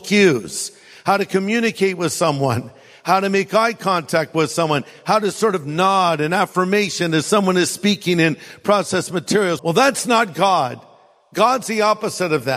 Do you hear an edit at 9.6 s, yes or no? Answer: yes